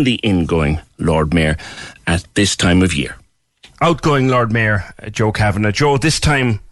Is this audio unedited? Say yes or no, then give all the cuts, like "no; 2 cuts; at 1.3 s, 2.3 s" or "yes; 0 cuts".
yes; 0 cuts